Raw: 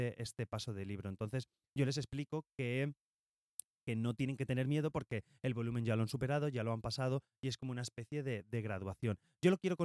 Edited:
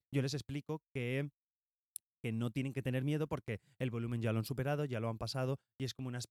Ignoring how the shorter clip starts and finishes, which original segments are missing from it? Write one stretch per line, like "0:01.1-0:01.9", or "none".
none